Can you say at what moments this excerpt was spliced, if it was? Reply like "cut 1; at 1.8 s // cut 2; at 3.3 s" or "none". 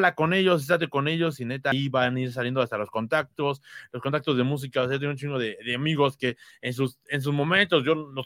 none